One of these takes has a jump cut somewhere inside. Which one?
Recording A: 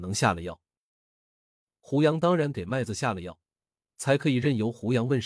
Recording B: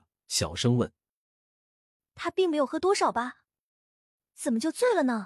A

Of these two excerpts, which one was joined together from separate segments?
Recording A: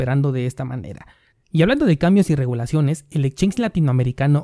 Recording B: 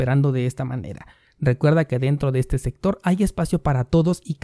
A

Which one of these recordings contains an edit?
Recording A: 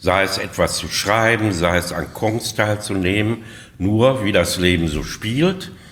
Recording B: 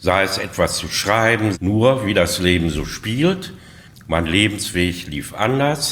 B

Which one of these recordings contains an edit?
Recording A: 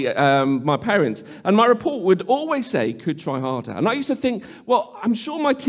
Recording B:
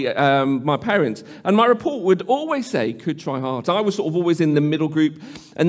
B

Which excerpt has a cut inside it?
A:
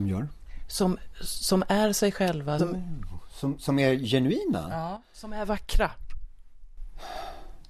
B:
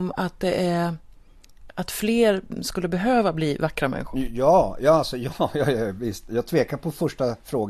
A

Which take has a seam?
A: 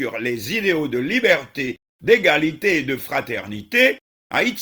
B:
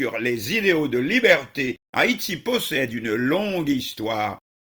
B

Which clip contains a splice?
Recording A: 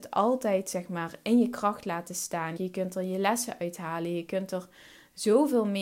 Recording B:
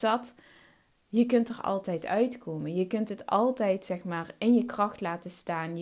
A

